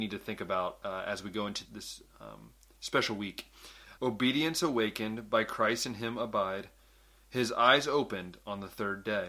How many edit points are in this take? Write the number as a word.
two